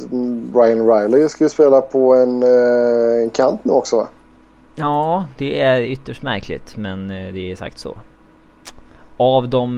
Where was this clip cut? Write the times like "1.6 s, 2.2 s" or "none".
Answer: none